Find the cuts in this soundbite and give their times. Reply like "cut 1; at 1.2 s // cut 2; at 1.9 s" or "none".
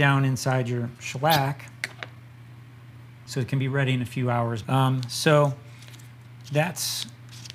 cut 1; at 3.3 s // cut 2; at 4.6 s